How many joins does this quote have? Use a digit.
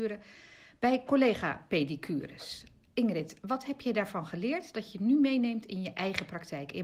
0